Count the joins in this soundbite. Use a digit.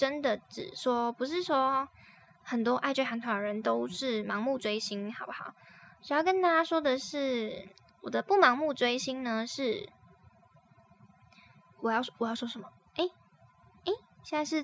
0